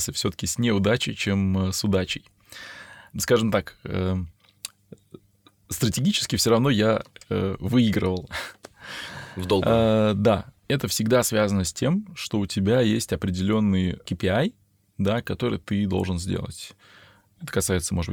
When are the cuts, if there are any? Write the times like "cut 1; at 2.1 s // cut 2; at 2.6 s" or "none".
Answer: none